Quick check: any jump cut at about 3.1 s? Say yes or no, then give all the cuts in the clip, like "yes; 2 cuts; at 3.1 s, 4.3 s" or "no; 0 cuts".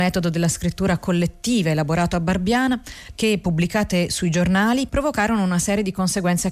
yes; 2 cuts; at 3.1 s, 4.9 s